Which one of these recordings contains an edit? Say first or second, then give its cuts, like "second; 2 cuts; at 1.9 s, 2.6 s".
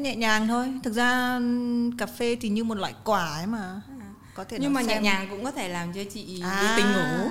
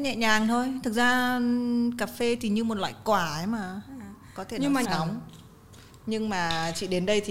second; 1 cut; at 4.8 s